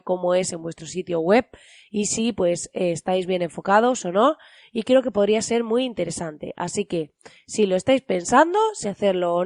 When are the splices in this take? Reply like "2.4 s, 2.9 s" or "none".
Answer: none